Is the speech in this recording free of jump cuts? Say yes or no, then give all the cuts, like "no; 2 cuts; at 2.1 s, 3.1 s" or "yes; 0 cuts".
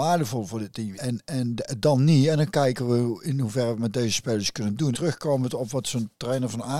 no; 2 cuts; at 1.0 s, 4.9 s